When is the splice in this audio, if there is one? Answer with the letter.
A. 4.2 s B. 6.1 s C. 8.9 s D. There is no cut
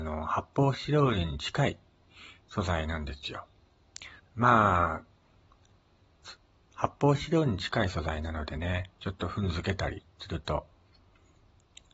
A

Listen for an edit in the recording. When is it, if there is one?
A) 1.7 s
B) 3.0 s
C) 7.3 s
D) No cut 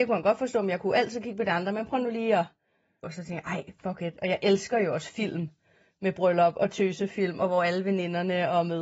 B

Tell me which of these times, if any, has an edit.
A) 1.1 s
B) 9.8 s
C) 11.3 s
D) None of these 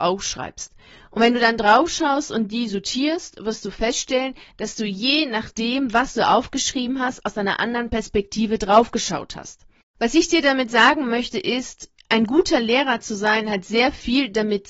B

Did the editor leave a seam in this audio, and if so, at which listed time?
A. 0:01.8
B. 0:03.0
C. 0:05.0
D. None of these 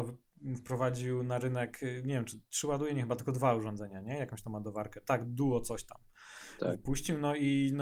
D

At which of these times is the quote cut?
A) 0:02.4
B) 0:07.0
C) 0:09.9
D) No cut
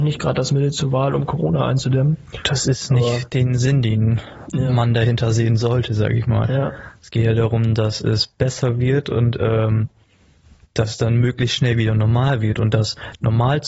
D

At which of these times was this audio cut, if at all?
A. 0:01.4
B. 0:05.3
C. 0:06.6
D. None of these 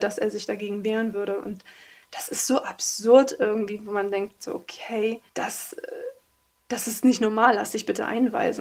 B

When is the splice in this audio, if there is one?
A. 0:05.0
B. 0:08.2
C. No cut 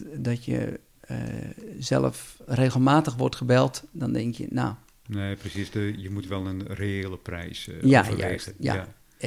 A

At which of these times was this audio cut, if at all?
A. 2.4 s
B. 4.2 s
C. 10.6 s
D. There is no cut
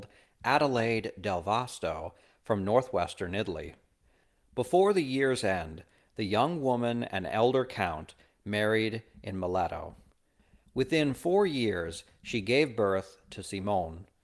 D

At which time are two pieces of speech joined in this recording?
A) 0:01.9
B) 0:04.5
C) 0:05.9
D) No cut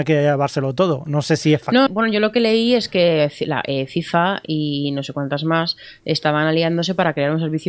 A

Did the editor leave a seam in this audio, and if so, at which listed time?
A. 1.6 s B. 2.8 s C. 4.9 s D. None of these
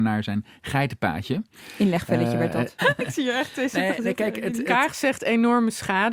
B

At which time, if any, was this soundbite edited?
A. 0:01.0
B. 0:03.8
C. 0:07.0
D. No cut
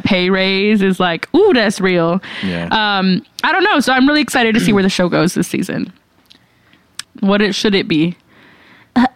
C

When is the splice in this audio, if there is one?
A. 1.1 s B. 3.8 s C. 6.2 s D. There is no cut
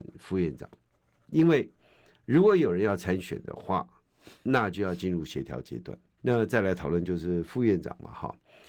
C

